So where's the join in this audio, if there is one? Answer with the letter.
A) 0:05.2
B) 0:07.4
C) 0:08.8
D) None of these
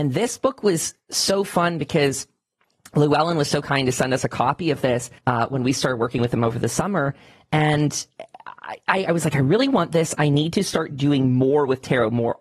A